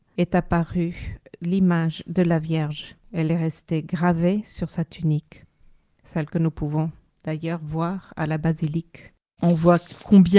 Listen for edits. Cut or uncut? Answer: cut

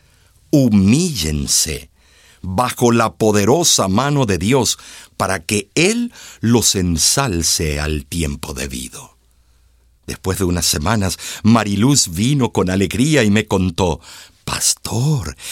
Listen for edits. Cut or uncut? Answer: cut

